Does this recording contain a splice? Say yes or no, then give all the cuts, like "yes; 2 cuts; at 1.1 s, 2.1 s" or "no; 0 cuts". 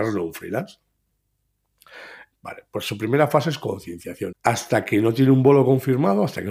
yes; 2 cuts; at 2.3 s, 4.3 s